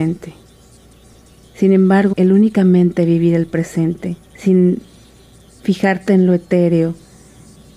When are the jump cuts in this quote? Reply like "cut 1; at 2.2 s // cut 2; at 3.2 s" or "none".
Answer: cut 1; at 2.1 s // cut 2; at 4.3 s